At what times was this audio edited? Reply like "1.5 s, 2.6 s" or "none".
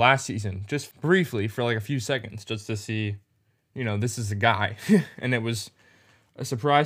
0.9 s